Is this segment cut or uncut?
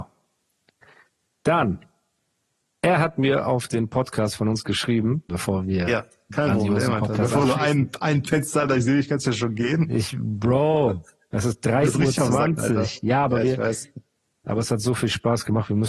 cut